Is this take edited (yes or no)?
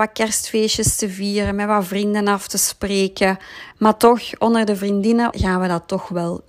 yes